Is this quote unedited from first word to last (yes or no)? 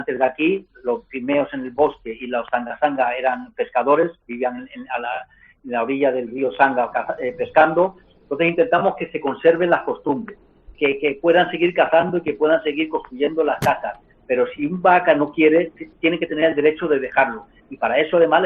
no